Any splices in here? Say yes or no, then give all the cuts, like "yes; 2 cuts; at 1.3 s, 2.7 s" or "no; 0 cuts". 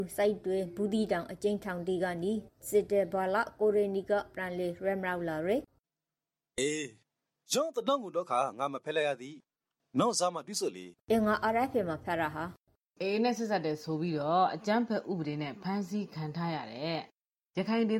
yes; 1 cut; at 11.0 s